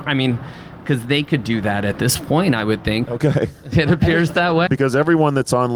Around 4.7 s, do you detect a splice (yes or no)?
yes